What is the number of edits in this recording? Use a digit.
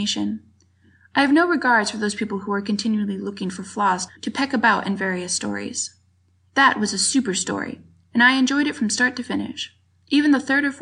1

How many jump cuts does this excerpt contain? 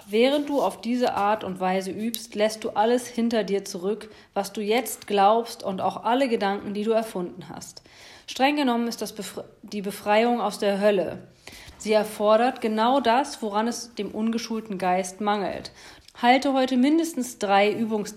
2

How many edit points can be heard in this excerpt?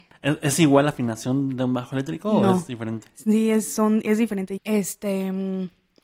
1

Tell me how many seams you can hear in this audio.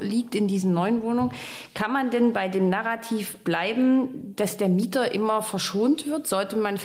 0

